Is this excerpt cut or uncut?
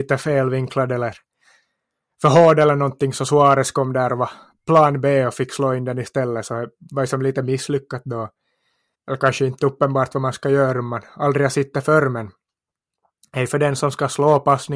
cut